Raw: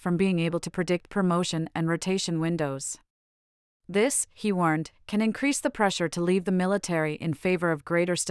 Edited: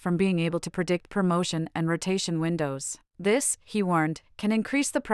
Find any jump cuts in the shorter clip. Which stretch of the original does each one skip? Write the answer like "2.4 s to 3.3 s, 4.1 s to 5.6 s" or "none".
3.1 s to 3.8 s